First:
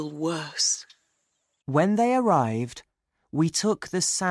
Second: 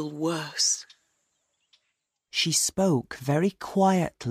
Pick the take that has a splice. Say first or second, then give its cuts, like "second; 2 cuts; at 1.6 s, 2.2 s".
first; 1 cut; at 1.6 s